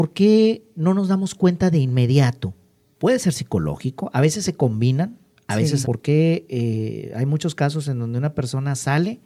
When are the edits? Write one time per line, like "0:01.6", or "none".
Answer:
0:02.9
0:05.8